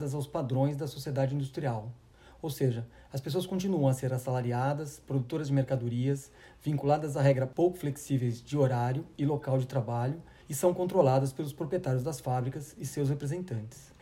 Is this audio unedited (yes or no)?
yes